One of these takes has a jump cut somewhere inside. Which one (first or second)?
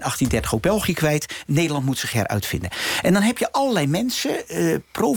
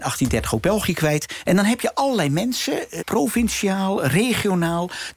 second